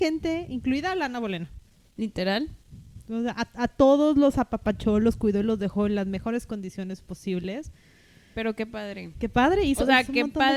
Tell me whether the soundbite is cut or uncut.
uncut